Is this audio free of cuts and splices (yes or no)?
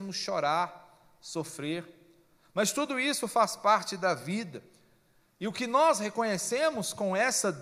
yes